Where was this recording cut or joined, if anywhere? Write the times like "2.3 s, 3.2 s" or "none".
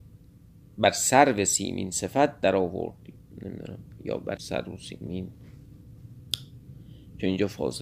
4.4 s